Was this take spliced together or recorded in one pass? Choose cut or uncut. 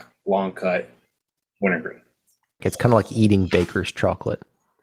cut